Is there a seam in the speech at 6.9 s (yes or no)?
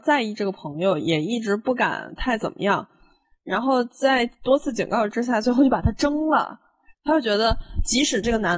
yes